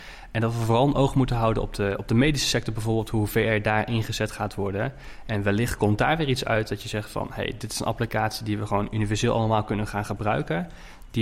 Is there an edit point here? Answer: no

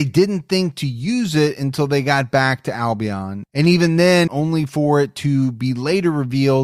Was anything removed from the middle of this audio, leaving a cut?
yes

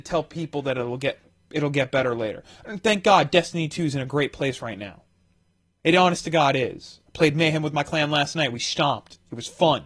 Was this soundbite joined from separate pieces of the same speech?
no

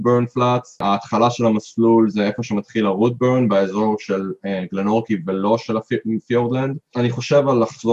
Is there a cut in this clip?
yes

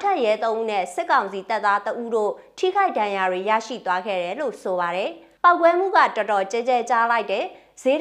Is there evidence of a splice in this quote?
no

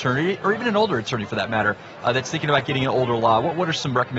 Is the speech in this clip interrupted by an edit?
no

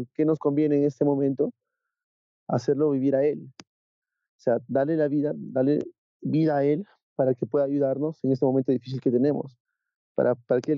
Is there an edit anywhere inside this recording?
no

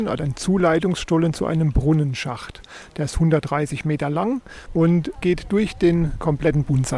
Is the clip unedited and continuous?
yes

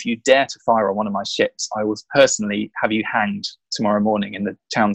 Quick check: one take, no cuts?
yes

